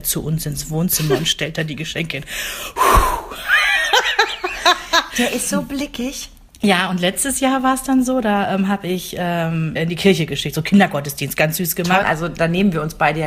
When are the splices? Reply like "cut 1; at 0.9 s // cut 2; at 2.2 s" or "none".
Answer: cut 1; at 9.8 s // cut 2; at 12.0 s

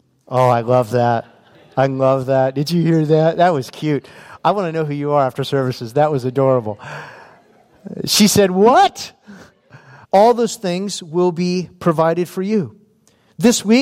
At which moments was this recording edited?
cut 1; at 10.0 s

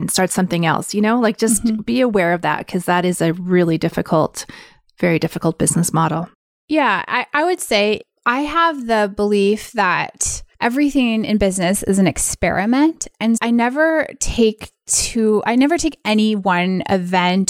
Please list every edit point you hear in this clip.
cut 1; at 10.5 s // cut 2; at 13.4 s

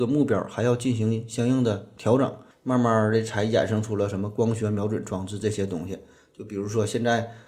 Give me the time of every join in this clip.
cut 1; at 2.5 s

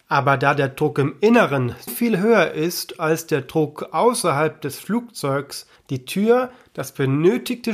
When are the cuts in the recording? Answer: cut 1; at 1.9 s // cut 2; at 5.8 s

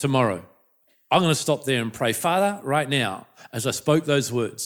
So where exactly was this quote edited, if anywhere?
none

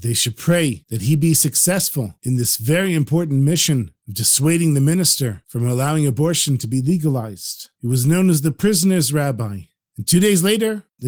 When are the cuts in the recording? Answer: cut 1; at 7.8 s // cut 2; at 9.8 s

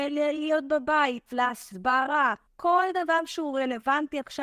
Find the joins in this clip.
cut 1; at 1.3 s // cut 2; at 2.5 s

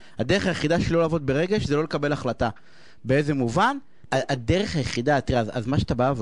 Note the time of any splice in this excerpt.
cut 1; at 4.1 s

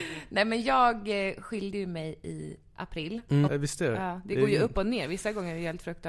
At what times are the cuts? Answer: cut 1; at 3.5 s

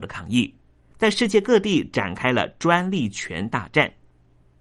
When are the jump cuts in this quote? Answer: cut 1; at 0.9 s

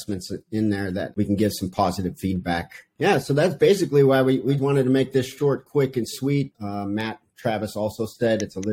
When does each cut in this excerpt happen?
cut 1; at 4.6 s // cut 2; at 6.5 s

